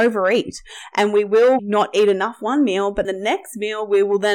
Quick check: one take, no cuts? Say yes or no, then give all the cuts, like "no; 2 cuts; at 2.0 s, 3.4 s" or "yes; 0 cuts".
no; 2 cuts; at 1.6 s, 3.0 s